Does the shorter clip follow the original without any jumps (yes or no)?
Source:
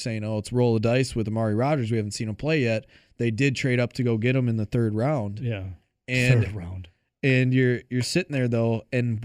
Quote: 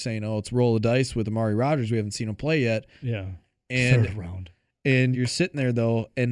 no